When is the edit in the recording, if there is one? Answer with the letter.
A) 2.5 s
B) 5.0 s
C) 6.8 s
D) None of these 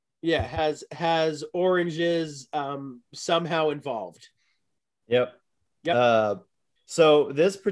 C